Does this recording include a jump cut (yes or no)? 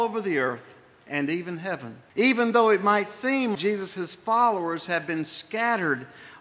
yes